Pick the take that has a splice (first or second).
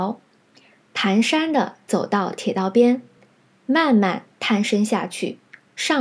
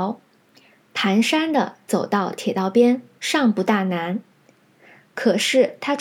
second